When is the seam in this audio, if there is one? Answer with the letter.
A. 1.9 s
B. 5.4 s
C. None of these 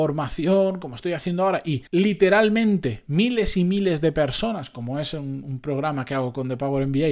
A